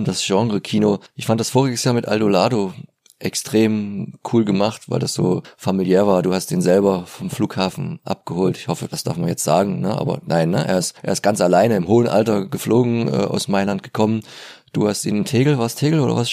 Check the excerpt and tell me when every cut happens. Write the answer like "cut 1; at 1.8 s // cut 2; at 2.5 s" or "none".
none